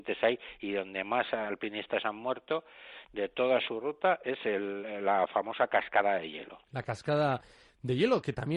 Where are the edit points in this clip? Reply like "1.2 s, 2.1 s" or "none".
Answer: 6.7 s